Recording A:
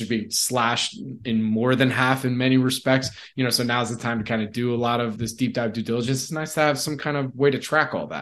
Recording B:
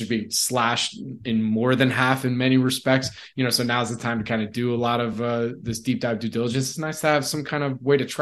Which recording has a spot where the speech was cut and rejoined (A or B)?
A